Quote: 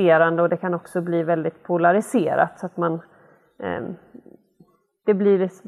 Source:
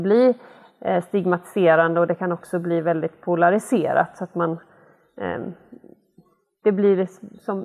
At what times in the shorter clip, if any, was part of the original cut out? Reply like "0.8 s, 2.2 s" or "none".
none